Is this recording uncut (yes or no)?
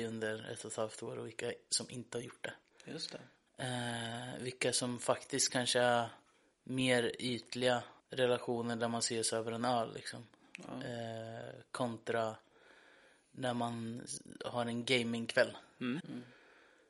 no